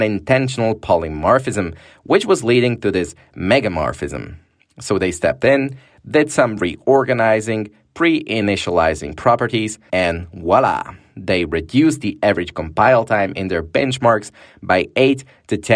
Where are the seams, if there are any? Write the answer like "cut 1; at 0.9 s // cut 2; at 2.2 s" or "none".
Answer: cut 1; at 9.9 s